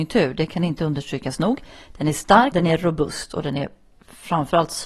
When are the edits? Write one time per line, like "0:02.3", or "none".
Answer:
0:02.5